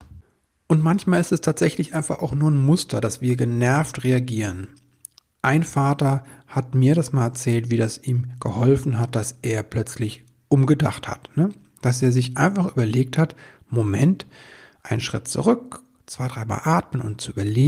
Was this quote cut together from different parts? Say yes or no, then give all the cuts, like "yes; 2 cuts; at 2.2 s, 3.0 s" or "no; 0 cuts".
no; 0 cuts